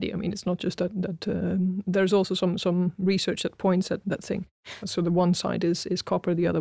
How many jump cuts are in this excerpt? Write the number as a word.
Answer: one